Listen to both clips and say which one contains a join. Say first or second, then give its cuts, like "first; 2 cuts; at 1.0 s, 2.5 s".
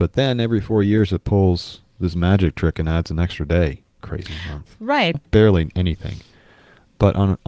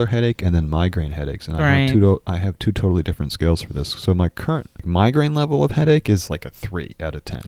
first; 2 cuts; at 3.9 s, 5.1 s